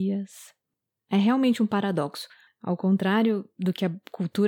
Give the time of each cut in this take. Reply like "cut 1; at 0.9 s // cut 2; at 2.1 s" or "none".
cut 1; at 1.0 s // cut 2; at 2.5 s